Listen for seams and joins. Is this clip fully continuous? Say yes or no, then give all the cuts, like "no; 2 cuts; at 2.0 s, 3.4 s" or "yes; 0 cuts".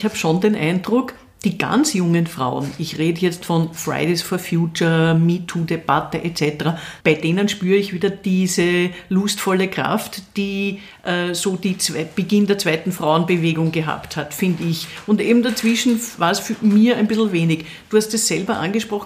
no; 1 cut; at 7.0 s